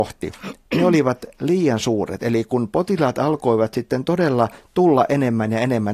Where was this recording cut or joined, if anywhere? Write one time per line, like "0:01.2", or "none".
none

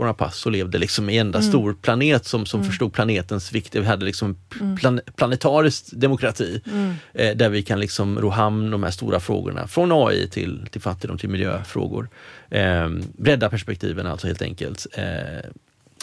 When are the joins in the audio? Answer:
none

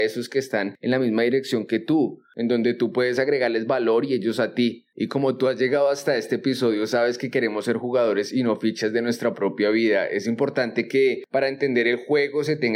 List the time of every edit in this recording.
0:04.9

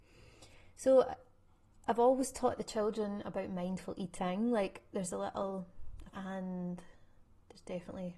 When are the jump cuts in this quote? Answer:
0:06.1

